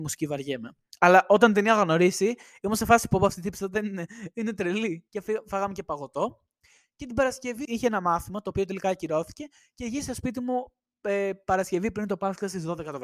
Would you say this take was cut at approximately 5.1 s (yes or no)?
yes